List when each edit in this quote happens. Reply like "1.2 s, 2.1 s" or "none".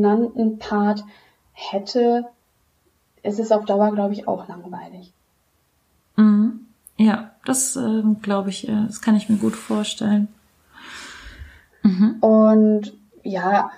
11.7 s